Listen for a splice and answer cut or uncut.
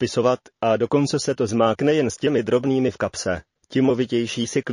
uncut